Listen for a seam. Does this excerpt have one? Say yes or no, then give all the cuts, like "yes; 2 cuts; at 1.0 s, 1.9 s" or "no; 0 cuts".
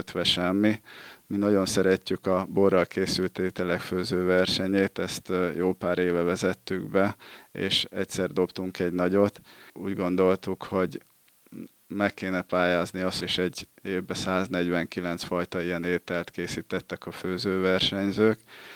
yes; 2 cuts; at 9.7 s, 13.2 s